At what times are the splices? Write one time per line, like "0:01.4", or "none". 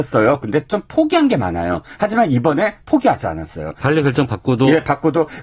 none